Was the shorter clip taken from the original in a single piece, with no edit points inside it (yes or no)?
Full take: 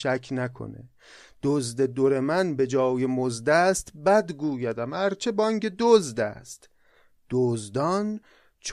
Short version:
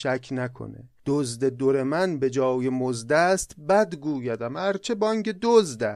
no